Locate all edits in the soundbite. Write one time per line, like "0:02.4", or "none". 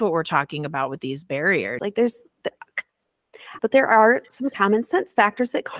0:01.8
0:03.6